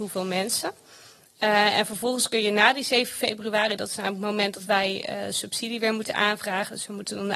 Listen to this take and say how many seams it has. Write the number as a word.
zero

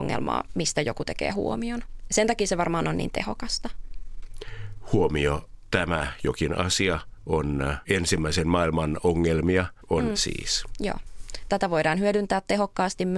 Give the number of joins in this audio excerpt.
one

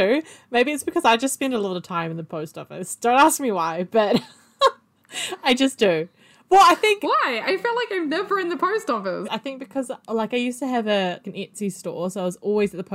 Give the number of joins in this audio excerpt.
two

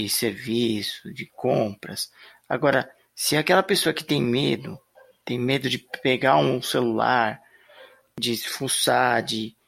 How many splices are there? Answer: zero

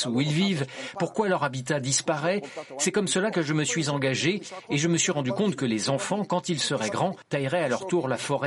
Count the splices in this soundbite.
zero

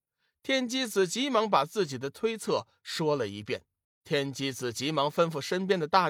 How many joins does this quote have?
one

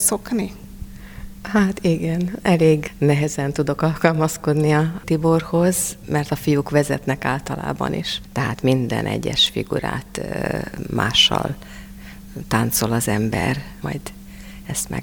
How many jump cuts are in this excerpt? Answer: two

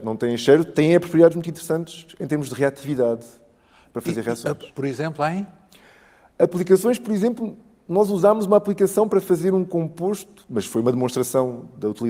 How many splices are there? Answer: one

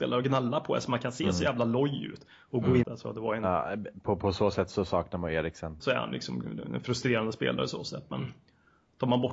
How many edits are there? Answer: two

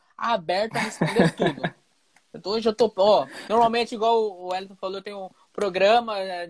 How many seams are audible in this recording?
zero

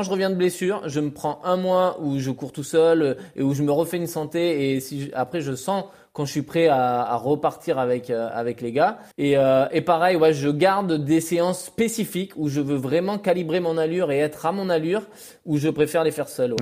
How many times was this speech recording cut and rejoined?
one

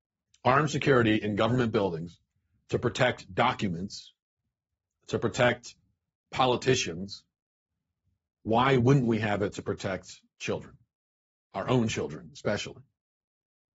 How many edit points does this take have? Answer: zero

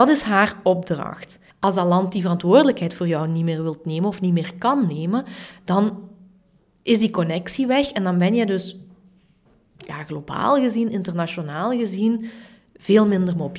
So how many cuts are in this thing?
one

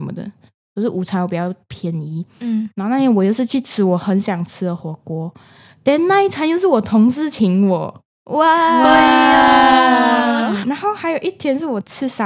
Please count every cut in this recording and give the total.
one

